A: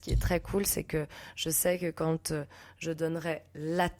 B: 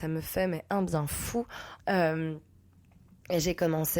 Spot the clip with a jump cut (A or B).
B